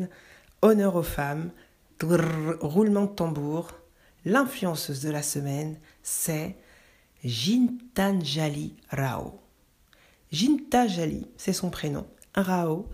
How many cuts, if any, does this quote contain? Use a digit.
1